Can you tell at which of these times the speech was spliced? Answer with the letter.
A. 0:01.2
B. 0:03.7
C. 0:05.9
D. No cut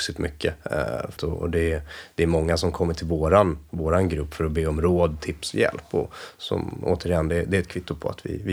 A